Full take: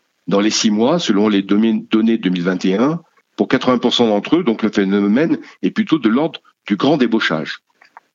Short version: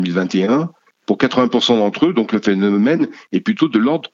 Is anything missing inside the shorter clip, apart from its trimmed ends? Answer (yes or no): no